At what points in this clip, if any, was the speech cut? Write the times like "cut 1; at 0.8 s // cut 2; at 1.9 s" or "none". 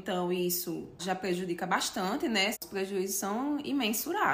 cut 1; at 1.0 s // cut 2; at 2.5 s